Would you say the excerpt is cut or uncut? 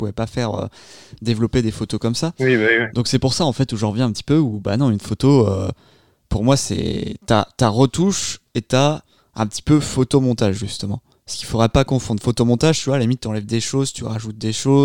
uncut